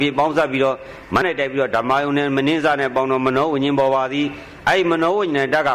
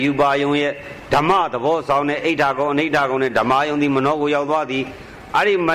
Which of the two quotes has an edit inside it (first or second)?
first